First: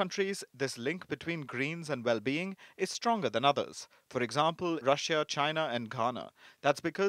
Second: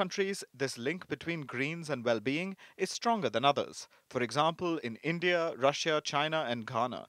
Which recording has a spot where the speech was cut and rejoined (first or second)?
first